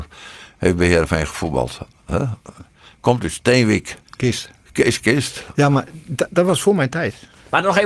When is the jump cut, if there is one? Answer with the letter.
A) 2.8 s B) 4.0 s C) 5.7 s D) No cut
B